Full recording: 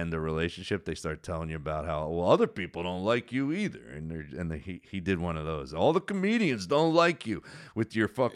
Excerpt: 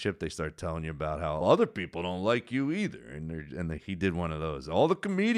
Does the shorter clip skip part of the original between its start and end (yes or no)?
yes